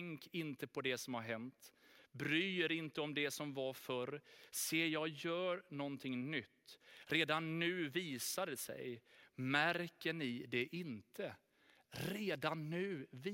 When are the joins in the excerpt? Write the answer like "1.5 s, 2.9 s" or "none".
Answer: none